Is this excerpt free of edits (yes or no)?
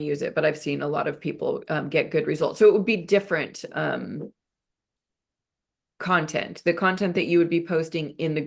yes